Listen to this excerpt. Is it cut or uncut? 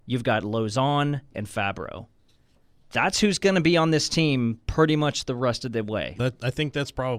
cut